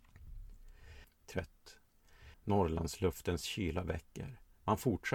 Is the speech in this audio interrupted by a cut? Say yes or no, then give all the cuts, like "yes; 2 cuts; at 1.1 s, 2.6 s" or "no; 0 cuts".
yes; 2 cuts; at 1.0 s, 2.3 s